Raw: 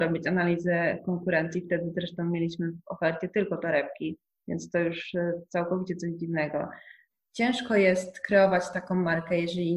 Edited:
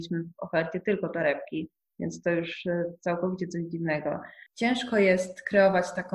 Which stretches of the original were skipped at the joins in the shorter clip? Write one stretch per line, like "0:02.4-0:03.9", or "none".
0:06.9-0:07.2